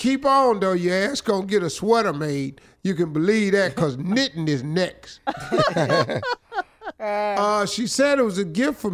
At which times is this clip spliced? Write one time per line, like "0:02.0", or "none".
none